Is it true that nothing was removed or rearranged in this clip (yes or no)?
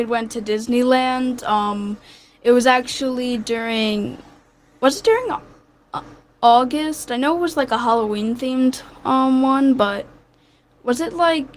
yes